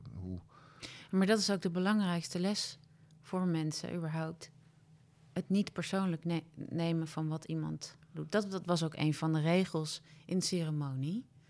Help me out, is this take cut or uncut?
uncut